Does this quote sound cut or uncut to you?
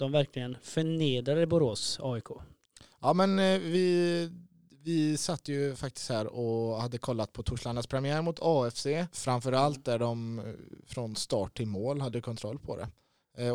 cut